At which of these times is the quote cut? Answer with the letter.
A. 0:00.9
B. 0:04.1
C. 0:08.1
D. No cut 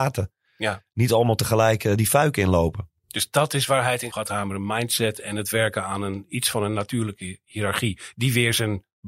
B